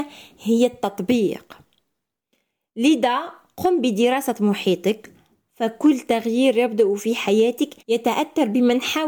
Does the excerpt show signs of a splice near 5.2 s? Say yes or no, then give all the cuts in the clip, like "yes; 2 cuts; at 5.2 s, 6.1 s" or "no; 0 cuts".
no; 1 cut; at 7.8 s